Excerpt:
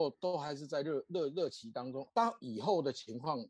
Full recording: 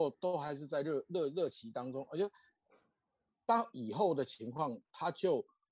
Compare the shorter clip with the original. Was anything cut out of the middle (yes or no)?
yes